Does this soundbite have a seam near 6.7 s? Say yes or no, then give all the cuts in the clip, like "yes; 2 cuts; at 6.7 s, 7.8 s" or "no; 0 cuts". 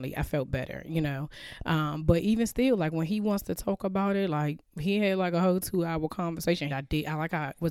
yes; 1 cut; at 6.7 s